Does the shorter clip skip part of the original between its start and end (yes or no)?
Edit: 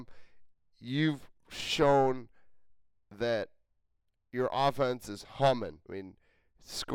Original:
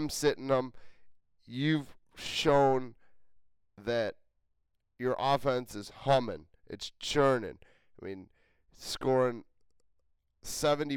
yes